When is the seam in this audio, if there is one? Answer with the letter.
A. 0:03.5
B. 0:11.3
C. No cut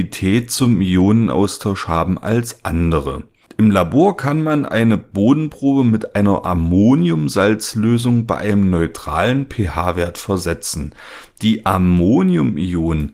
A